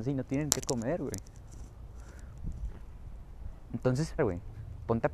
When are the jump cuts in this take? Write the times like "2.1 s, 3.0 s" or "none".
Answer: 4.2 s